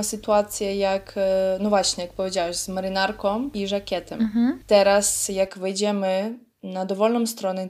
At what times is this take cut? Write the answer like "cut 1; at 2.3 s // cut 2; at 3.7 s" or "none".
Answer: none